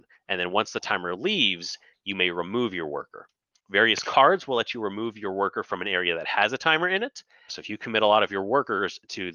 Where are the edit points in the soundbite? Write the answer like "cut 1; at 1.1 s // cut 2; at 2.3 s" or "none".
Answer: cut 1; at 7.5 s